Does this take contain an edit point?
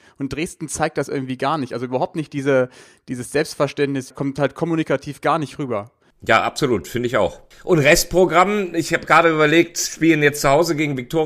yes; 2 cuts; at 4.1 s, 7.5 s

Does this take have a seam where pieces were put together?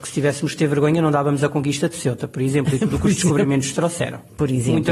no; 0 cuts

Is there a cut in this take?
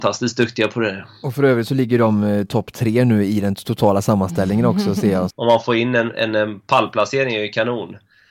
yes; 1 cut; at 5.3 s

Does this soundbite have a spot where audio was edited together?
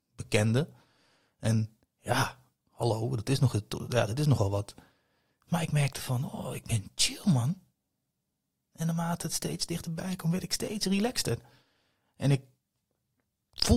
no; 0 cuts

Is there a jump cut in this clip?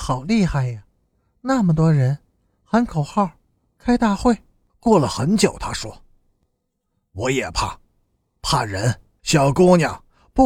yes; 2 cuts; at 4.7 s, 9.2 s

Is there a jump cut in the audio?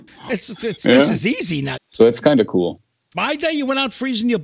yes; 2 cuts; at 1.7 s, 3.1 s

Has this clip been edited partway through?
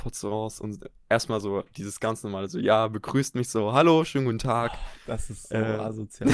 no; 0 cuts

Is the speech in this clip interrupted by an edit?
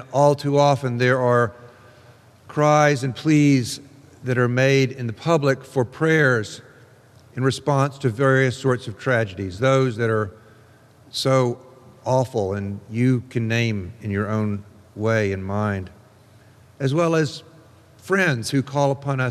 no; 0 cuts

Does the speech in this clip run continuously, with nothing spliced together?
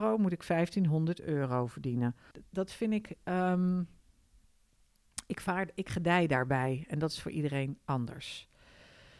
no; 1 cut; at 2.3 s

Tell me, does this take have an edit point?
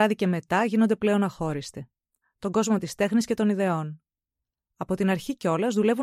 yes; 1 cut; at 2.2 s

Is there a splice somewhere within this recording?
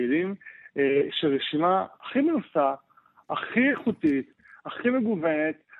no; 0 cuts

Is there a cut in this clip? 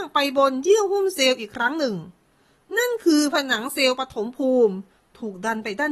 no; 0 cuts

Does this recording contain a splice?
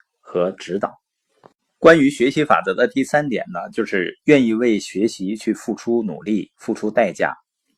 no; 0 cuts

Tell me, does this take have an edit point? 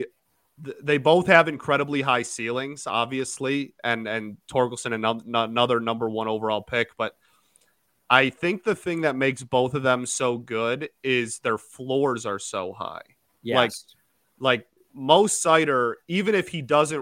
no; 0 cuts

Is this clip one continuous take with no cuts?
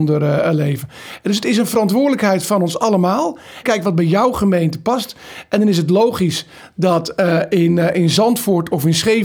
no; 1 cut; at 3.6 s

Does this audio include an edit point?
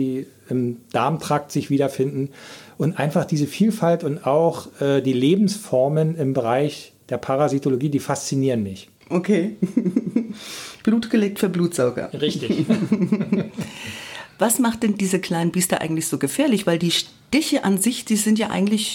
no; 0 cuts

